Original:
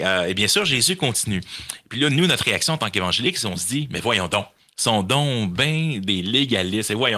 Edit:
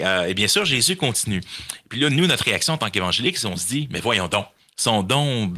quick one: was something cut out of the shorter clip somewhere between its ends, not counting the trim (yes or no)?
no